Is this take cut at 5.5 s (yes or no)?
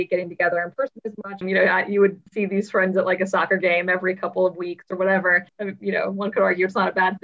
yes